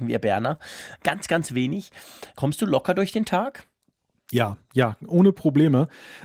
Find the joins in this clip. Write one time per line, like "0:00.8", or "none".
0:02.4